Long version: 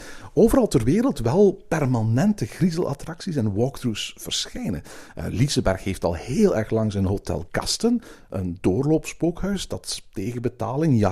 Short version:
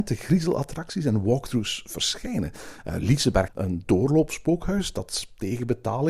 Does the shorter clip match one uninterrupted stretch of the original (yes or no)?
no